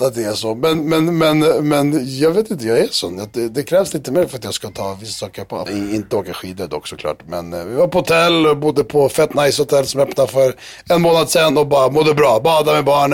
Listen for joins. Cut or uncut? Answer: cut